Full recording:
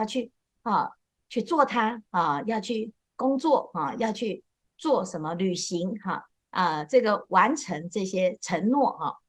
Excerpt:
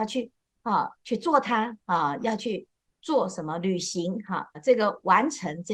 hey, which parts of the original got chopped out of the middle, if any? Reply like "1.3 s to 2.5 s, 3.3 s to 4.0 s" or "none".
1.0 s to 1.2 s, 2.4 s to 3.9 s, 6.3 s to 6.8 s